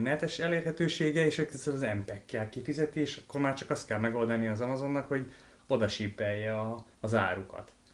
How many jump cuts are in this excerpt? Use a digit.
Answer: 1